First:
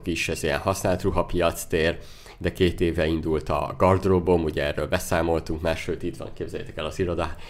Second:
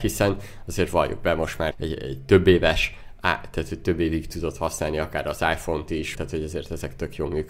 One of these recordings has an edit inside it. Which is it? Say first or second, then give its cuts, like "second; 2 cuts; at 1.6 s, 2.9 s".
second; 2 cuts; at 1.7 s, 6.1 s